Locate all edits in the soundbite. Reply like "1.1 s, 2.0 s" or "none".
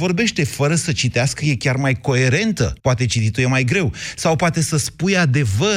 2.8 s

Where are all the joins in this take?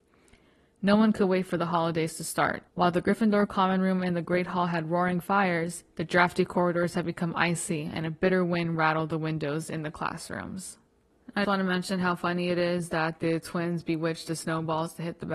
2.7 s, 11.4 s

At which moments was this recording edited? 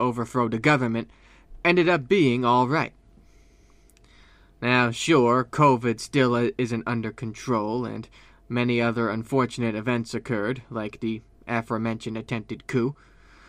none

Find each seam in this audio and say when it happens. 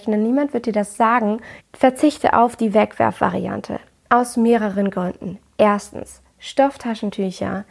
1.6 s

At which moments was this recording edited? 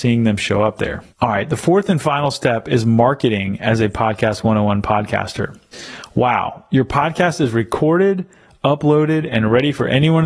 1.1 s

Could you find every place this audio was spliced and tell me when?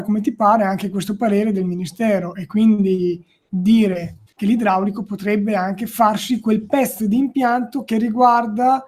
none

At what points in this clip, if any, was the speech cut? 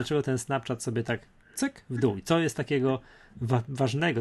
none

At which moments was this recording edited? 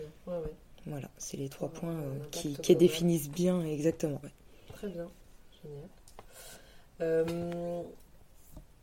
4.2 s

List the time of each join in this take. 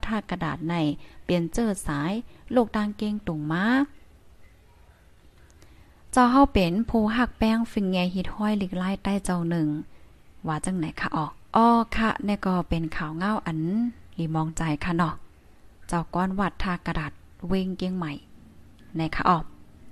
11.5 s

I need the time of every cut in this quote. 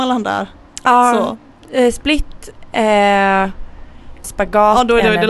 4.2 s

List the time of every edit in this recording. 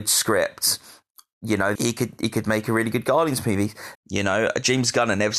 1.8 s, 4.0 s

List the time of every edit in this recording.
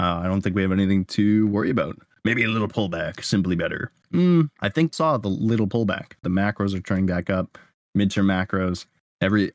4.9 s, 6.2 s

